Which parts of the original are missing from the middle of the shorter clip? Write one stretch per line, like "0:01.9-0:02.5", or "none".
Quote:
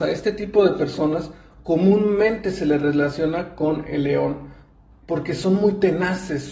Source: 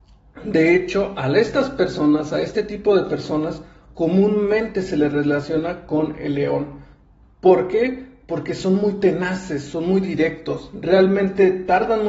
0:07.3-0:08.2